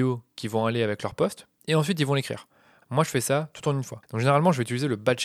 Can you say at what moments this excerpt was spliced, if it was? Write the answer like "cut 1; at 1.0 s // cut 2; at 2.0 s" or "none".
cut 1; at 1.6 s // cut 2; at 4.0 s

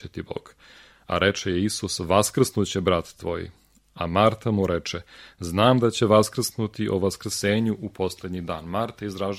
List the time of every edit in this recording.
none

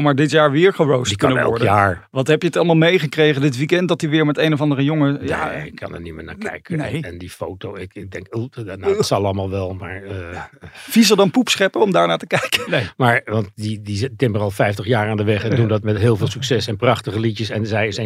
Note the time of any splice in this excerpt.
cut 1; at 12.7 s

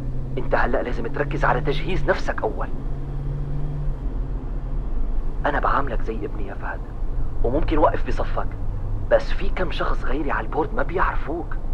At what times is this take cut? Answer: none

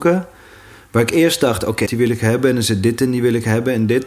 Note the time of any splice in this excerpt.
cut 1; at 1.9 s

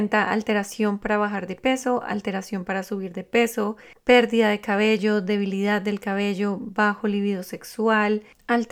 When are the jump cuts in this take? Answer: none

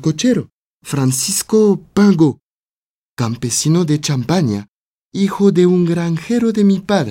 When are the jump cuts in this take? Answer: none

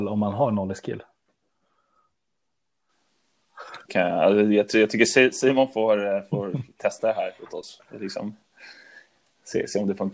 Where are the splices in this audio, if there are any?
cut 1; at 3.8 s // cut 2; at 7.4 s

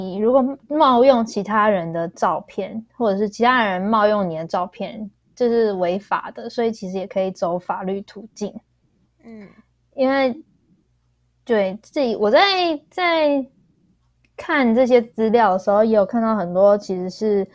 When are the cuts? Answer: none

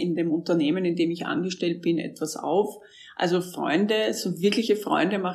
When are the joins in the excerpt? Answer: none

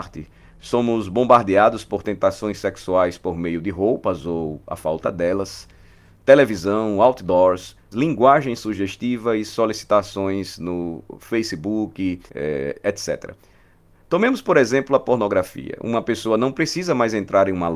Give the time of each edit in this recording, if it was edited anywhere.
cut 1; at 7.9 s // cut 2; at 12.3 s

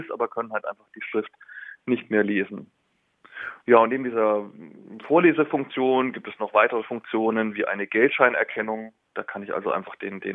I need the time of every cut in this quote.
none

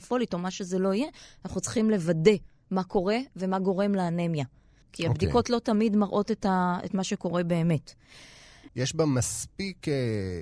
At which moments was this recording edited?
cut 1; at 4.8 s // cut 2; at 8.7 s

